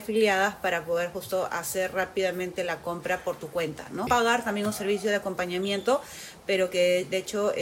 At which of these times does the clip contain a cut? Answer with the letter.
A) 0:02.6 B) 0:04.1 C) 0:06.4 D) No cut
B